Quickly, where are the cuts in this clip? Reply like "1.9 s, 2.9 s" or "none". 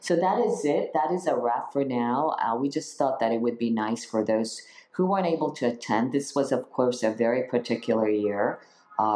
none